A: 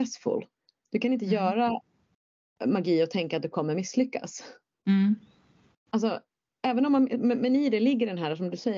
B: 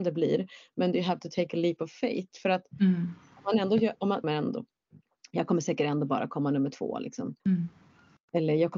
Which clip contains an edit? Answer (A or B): B